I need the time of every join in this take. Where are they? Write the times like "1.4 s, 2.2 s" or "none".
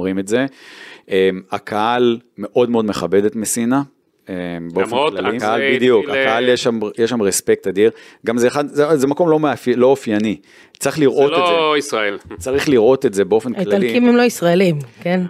5.4 s

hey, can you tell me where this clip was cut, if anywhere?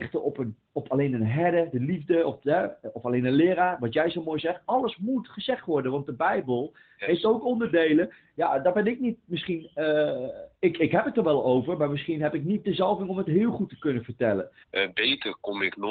10.6 s, 14.6 s

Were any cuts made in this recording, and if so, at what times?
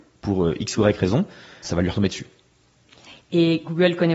1.6 s

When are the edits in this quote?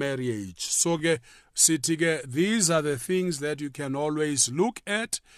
none

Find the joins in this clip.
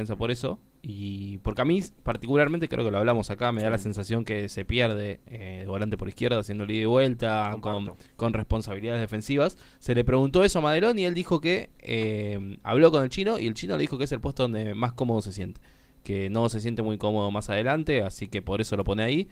none

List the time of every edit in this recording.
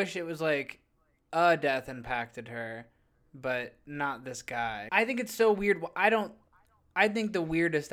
4.9 s

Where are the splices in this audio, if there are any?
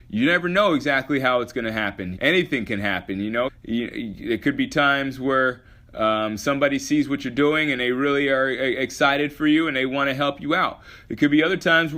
2.2 s, 3.5 s

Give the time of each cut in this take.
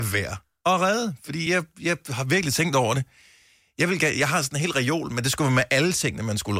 none

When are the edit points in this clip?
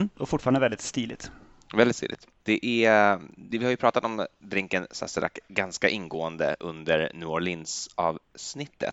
2.4 s, 3.5 s

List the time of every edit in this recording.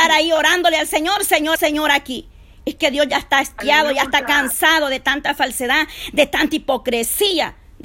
1.6 s

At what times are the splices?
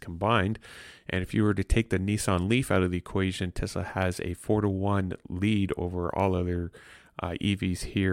none

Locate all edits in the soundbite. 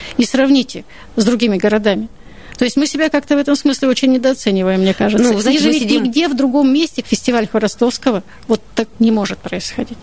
7.0 s, 8.9 s

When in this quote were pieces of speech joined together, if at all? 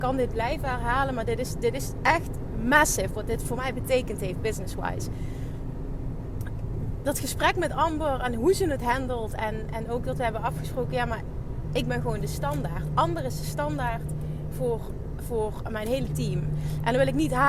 none

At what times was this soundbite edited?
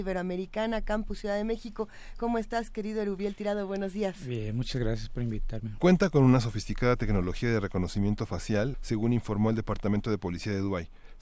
5.8 s, 8.7 s

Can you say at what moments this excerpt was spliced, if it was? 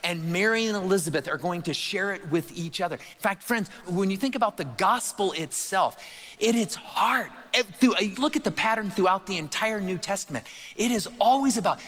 3.8 s, 8.1 s

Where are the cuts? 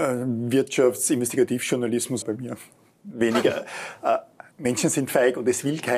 2.2 s, 4.5 s

